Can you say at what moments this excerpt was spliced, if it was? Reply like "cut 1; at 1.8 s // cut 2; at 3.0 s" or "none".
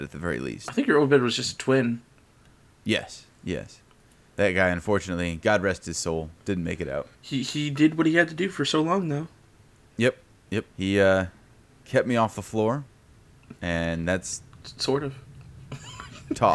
cut 1; at 7.1 s // cut 2; at 10.7 s // cut 3; at 13.6 s